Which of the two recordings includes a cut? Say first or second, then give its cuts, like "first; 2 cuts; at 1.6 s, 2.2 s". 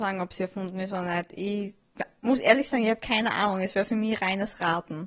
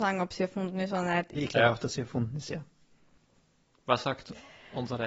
second; 1 cut; at 1.3 s